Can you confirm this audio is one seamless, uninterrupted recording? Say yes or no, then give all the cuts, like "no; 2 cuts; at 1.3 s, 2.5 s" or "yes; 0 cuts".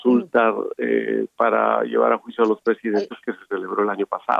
yes; 0 cuts